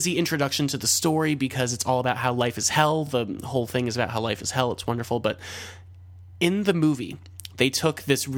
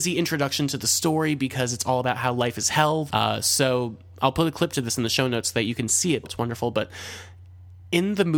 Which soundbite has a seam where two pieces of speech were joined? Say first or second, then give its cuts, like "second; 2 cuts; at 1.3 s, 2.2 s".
second; 2 cuts; at 3.1 s, 6.2 s